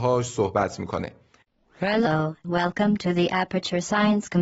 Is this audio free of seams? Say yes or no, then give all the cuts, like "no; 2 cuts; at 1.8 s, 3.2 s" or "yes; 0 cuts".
no; 1 cut; at 2.4 s